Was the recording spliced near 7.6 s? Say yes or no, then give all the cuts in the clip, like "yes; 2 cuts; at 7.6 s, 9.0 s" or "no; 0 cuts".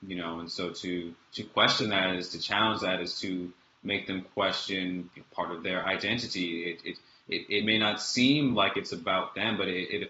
no; 0 cuts